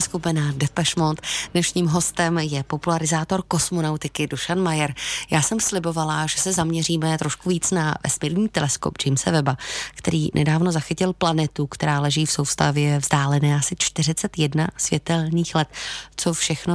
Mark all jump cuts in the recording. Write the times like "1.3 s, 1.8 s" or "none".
none